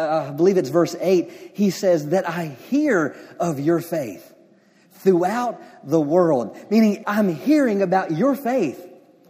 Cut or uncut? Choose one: cut